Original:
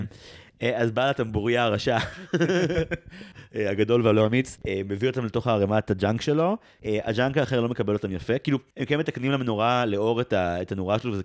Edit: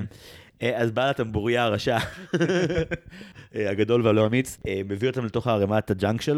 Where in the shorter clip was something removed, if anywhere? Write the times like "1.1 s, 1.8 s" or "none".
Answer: none